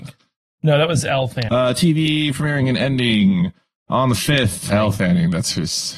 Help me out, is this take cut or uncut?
cut